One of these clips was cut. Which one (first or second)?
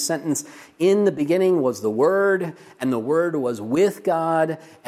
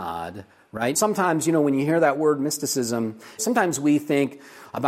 second